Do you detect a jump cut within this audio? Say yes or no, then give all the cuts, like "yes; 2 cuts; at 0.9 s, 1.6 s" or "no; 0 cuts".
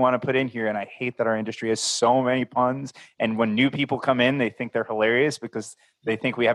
no; 0 cuts